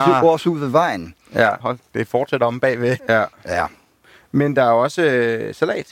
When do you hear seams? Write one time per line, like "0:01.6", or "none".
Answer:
0:01.6
0:03.0